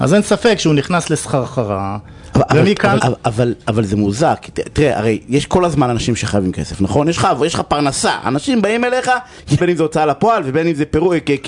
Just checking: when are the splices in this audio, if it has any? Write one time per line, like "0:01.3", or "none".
0:03.0
0:09.6